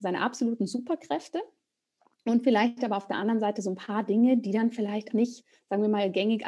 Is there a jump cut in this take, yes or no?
yes